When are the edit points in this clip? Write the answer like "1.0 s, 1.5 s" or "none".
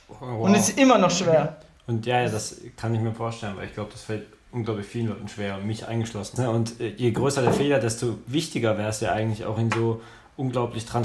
6.4 s